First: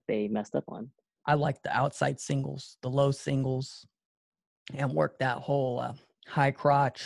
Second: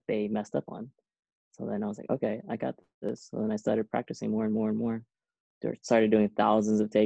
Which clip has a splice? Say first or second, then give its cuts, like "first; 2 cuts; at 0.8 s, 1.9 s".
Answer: first; 1 cut; at 1.2 s